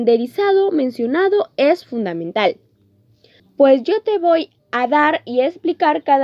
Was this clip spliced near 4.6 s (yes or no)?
yes